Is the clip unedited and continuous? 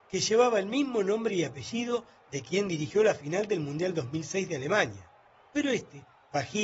yes; 0 cuts

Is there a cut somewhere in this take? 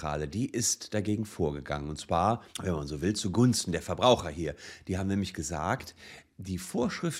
yes; 1 cut; at 2.5 s

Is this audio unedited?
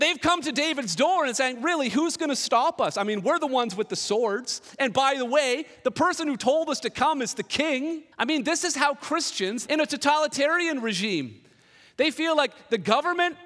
no; 2 cuts; at 8.1 s, 9.7 s

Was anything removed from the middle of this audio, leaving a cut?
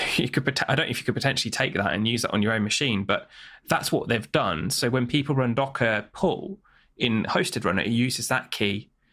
no; 0 cuts

